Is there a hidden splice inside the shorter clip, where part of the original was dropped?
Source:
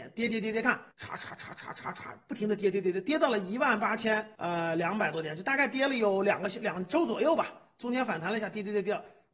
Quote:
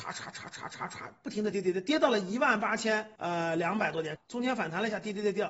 yes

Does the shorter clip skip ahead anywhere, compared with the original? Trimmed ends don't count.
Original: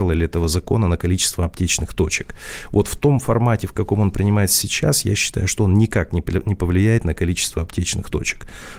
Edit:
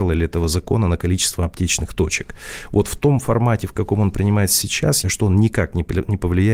yes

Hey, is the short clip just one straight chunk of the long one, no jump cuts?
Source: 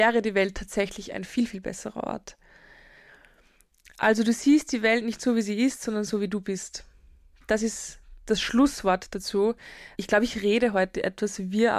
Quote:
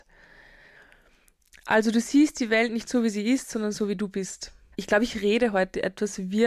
no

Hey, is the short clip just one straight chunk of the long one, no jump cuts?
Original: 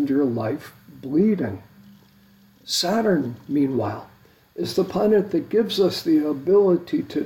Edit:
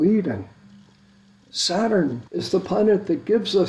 no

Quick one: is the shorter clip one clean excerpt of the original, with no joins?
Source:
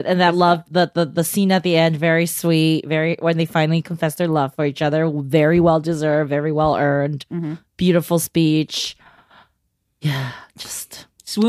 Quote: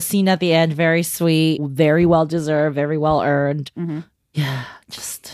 no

